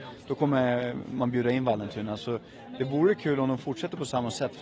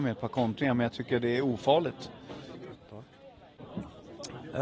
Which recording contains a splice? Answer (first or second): second